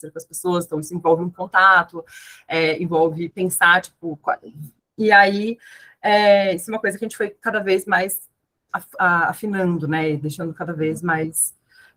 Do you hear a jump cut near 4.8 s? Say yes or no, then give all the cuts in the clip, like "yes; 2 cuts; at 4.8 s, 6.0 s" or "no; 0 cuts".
yes; 1 cut; at 4.8 s